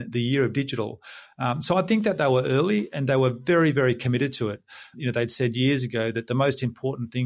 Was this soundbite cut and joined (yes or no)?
no